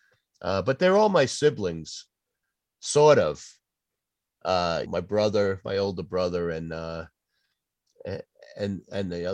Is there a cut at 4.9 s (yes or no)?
yes